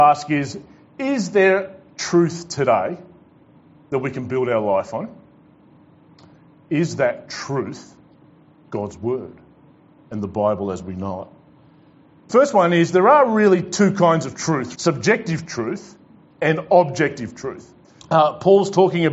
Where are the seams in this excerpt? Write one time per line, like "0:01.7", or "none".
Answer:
0:12.3
0:14.7
0:18.0